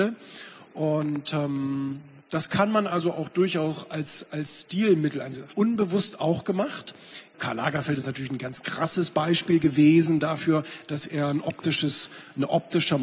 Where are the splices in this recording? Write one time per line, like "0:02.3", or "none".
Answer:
0:05.5
0:07.3

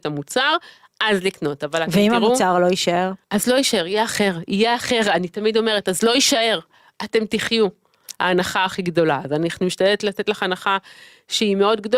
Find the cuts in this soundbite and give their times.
0:03.2
0:08.2

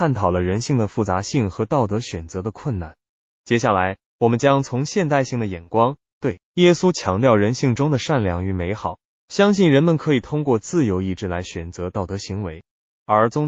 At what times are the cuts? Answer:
0:06.5

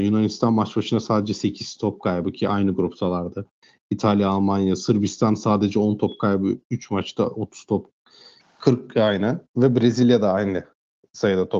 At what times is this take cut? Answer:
0:08.4

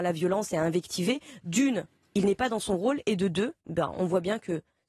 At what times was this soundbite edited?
0:03.6

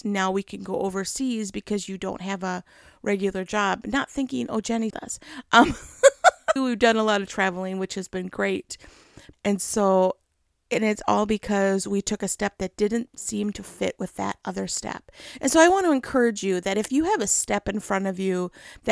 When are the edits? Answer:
0:04.9
0:06.6
0:09.3

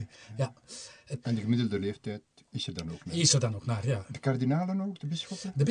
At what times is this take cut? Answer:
0:01.2

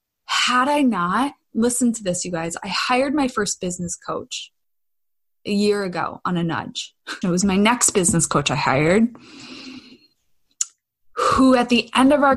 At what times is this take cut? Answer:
0:07.2

